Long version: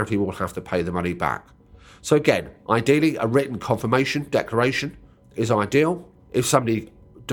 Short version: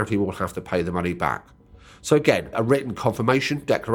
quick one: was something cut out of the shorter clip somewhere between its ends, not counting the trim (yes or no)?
yes